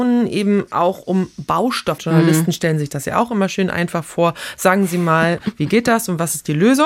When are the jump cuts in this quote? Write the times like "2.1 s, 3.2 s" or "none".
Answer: 2.0 s